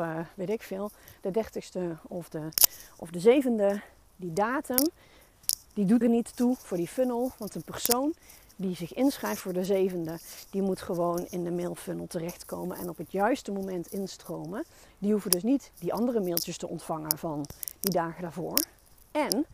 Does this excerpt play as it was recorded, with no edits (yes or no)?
no